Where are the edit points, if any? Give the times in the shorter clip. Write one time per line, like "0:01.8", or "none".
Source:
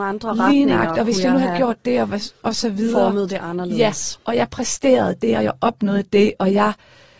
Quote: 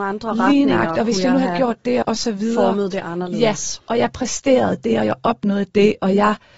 0:02.0